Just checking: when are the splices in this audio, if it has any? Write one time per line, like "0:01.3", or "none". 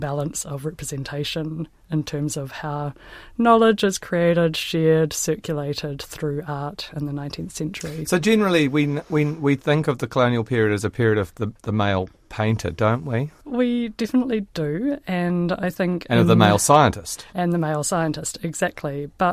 none